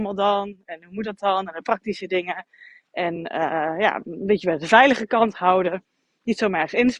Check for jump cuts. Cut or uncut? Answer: uncut